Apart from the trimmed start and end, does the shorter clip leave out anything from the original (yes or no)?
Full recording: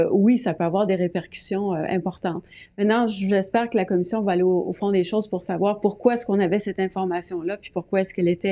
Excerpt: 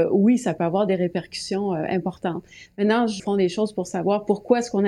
yes